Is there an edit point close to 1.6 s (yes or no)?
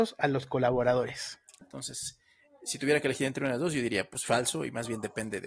yes